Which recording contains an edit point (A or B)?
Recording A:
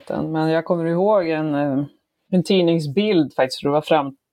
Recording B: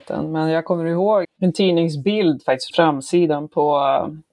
B